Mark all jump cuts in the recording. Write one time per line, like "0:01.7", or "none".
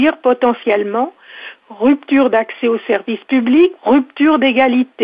0:03.8